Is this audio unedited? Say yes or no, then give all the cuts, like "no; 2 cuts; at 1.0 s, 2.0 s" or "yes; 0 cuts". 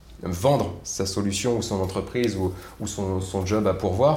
yes; 0 cuts